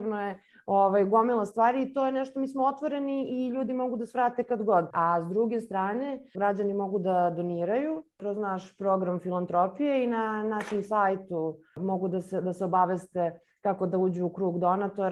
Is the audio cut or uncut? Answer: cut